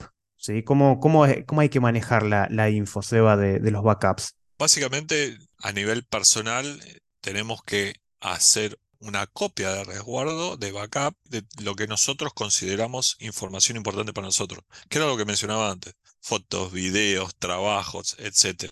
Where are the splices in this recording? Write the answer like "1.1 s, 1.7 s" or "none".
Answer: none

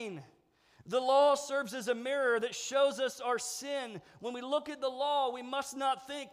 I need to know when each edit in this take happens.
none

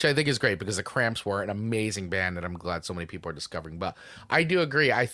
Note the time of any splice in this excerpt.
2.6 s

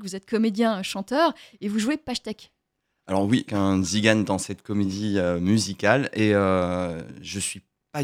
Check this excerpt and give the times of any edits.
3.5 s

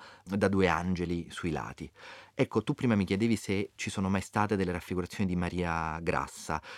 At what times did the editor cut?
none

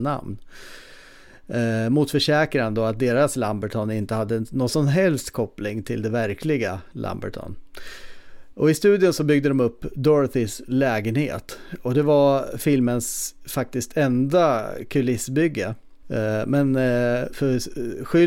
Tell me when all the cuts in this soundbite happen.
8.5 s, 16.0 s, 17.3 s

